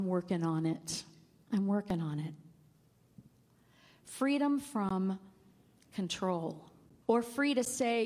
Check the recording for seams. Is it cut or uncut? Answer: cut